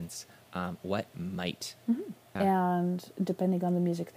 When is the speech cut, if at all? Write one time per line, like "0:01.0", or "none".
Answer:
0:02.4